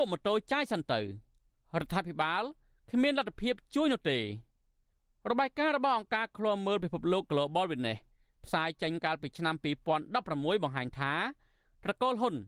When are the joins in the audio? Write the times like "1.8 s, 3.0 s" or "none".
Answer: none

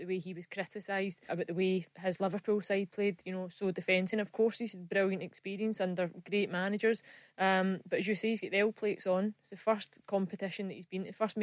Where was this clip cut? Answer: 1.3 s, 4.1 s

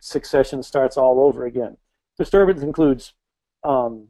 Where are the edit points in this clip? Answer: 2.0 s

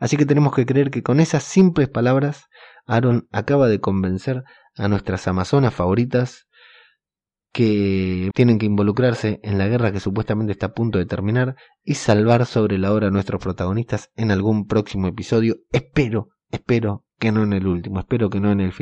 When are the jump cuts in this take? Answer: 8.3 s

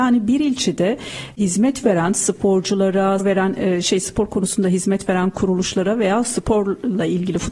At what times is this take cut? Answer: 3.2 s

